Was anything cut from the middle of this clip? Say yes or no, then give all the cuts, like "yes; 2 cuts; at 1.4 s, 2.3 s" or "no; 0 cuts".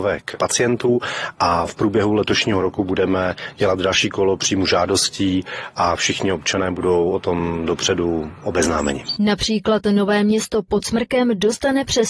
yes; 1 cut; at 9.2 s